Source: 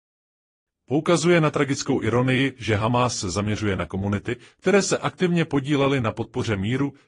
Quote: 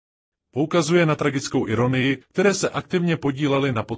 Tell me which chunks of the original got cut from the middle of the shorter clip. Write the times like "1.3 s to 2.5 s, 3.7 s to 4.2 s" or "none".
2.6 s to 4.5 s